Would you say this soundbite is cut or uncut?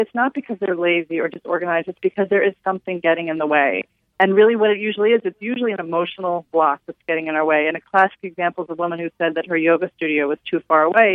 uncut